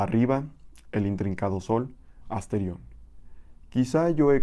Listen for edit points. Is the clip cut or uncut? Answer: cut